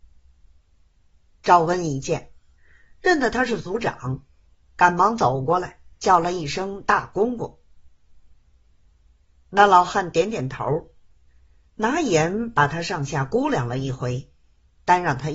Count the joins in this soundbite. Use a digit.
0